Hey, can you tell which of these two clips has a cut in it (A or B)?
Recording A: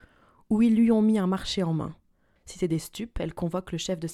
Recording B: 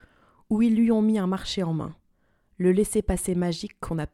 A